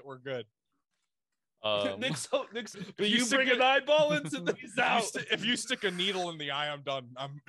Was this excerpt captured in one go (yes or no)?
no